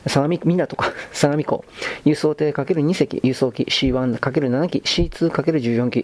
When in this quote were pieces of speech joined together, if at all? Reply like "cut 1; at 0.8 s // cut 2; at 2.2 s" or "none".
none